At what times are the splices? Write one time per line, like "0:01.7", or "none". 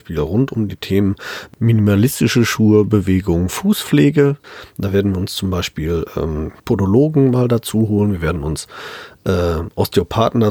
0:06.6